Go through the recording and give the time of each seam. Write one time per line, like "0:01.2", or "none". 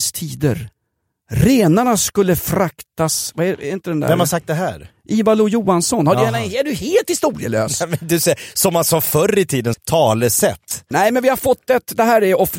0:09.7
0:10.9